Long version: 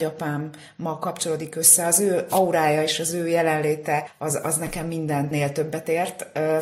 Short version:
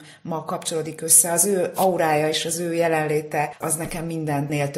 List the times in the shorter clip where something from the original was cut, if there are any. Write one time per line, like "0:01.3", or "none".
0:03.6